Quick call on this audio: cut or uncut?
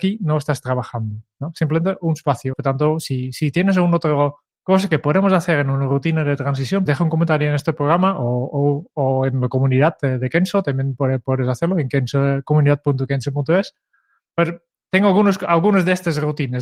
cut